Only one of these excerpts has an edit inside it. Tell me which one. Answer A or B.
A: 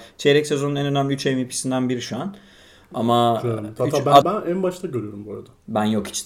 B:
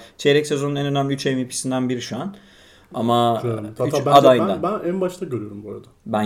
A